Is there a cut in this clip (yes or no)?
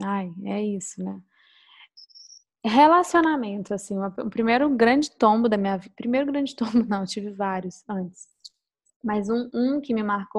no